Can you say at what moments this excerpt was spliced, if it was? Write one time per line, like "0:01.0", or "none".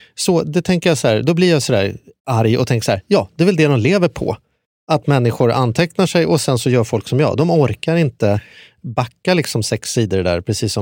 none